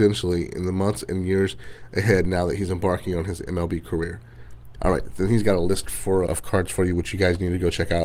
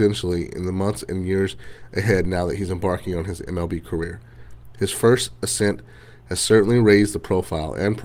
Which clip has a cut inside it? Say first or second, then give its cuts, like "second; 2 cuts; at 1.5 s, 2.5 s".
first; 2 cuts; at 4.8 s, 6.3 s